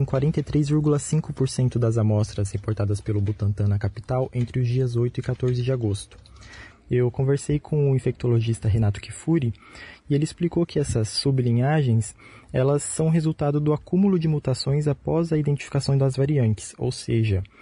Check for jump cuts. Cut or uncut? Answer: cut